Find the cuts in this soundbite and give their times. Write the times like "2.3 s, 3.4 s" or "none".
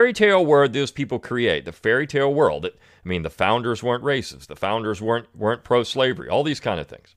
none